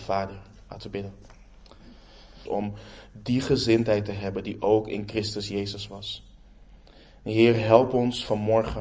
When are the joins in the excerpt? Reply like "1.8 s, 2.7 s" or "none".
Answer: 2.5 s